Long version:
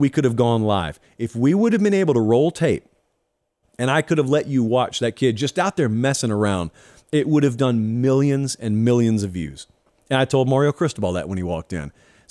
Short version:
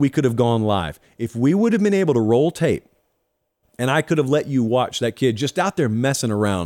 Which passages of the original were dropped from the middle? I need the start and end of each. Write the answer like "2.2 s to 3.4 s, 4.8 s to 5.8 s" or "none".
none